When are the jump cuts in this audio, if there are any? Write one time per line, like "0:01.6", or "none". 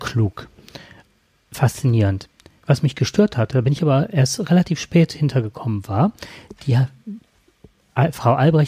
none